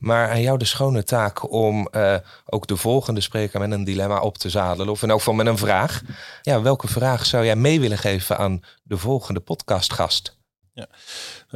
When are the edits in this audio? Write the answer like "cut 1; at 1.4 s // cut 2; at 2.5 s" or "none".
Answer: none